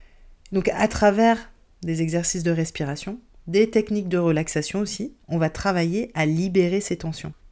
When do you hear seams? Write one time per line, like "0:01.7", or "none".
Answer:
0:03.3
0:05.2

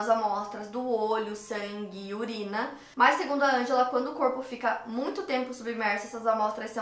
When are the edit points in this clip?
none

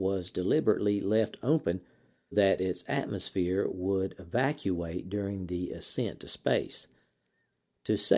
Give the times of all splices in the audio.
0:02.3

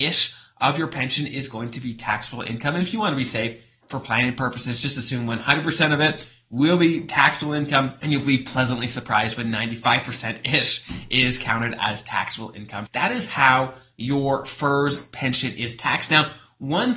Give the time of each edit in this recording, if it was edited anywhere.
0:08.0
0:12.9

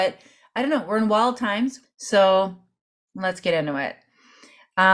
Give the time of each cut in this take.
0:01.8

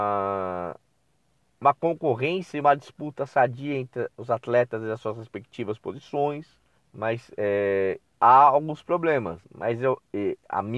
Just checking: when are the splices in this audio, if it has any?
0:06.8
0:08.1
0:09.4

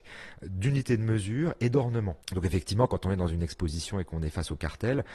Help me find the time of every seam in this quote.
0:02.2

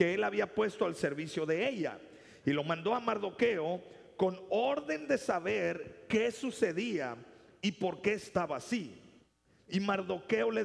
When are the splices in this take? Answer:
0:09.6

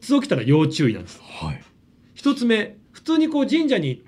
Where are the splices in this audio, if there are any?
0:02.8

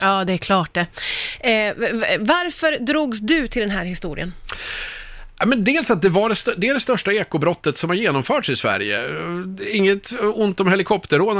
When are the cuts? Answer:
none

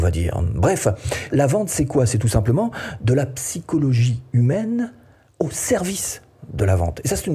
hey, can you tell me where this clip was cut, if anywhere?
0:01.3

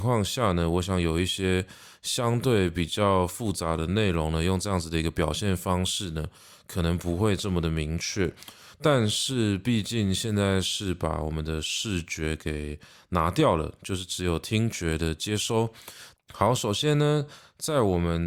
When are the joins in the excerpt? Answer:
0:08.7
0:16.2

